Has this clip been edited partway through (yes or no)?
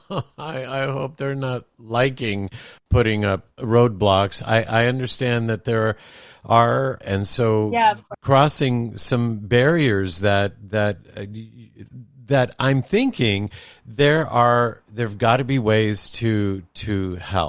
yes